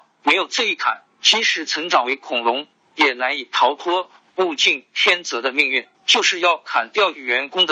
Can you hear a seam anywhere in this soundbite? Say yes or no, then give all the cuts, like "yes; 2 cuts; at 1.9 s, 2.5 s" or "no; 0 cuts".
yes; 1 cut; at 5.9 s